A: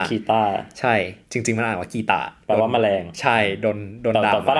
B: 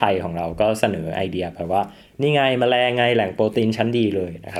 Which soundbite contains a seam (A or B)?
A